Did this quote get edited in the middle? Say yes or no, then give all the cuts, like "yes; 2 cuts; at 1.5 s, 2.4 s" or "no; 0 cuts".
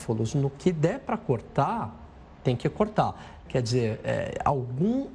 yes; 1 cut; at 3.5 s